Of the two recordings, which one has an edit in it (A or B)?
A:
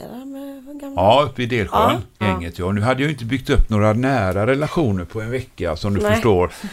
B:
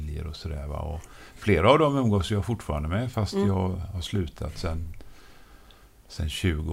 A